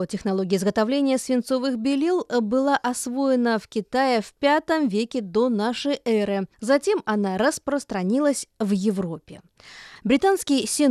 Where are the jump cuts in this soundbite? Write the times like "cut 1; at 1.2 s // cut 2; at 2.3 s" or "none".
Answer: cut 1; at 6.5 s // cut 2; at 10.0 s